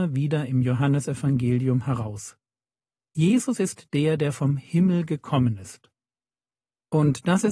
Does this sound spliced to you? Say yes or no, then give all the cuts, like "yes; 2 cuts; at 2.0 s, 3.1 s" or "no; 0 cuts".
no; 0 cuts